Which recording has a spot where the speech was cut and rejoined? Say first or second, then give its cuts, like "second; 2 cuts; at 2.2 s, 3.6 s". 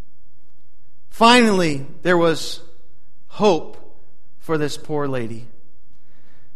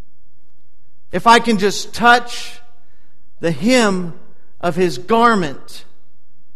second; 1 cut; at 1.1 s